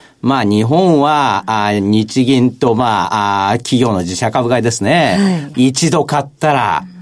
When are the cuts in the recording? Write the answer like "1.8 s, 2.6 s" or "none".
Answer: 5.5 s